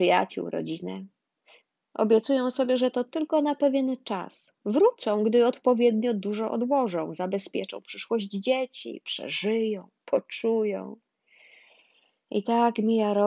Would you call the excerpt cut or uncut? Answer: uncut